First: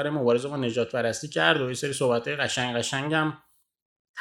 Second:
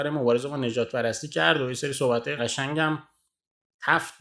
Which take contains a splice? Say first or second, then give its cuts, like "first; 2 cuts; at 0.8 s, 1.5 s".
second; 1 cut; at 2.4 s